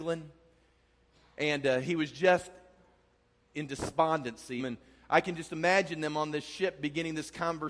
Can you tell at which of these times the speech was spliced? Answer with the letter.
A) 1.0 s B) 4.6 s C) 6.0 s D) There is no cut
B